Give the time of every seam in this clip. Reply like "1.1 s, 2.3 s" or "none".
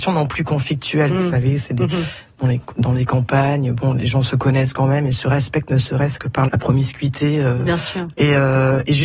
1.1 s, 6.5 s, 8.1 s